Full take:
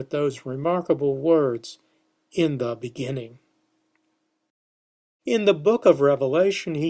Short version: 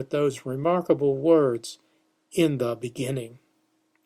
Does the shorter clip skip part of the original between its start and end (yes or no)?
no